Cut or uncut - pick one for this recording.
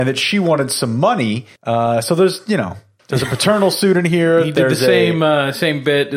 cut